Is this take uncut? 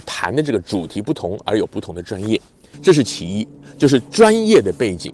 no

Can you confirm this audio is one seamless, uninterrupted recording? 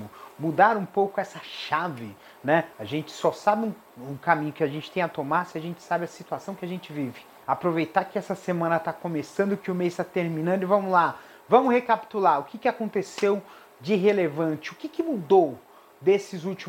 no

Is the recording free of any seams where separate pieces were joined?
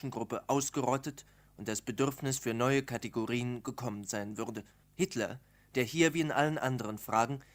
no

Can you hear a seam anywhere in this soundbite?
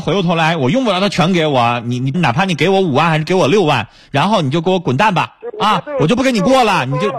yes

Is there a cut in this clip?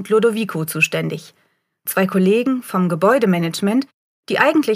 no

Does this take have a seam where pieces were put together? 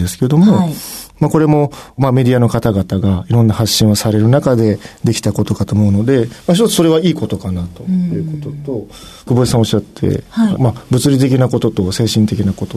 yes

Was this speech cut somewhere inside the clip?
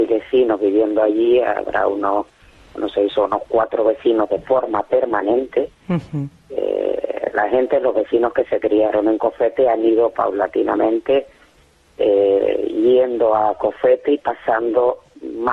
no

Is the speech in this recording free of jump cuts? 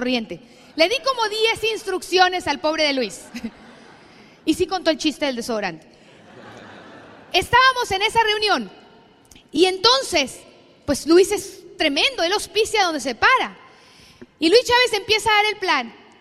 yes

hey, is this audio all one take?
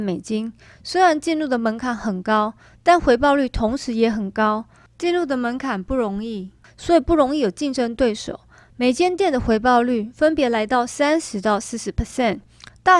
yes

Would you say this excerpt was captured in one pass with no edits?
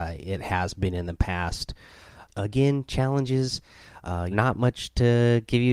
no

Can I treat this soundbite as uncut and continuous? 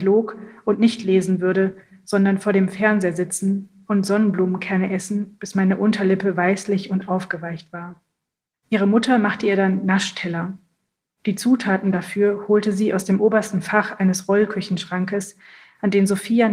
no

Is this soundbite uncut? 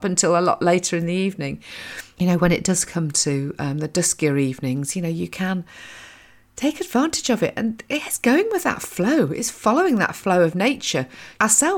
yes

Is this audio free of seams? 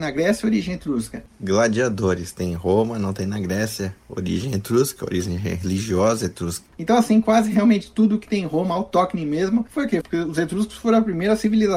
no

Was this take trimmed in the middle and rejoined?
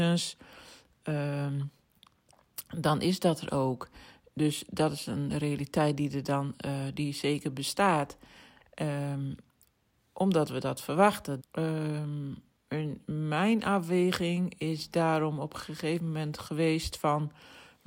yes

